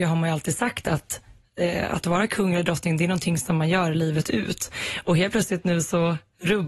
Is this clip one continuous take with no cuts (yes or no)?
yes